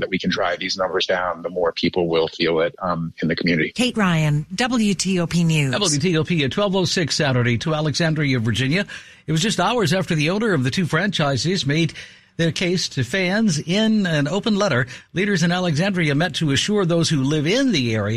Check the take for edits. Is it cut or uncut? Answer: cut